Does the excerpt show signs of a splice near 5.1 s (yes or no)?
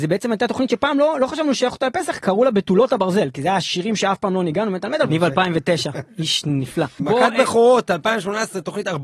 yes